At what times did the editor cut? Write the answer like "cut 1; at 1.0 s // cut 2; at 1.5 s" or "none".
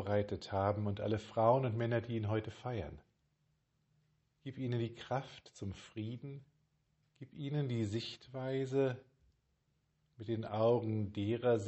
cut 1; at 7.1 s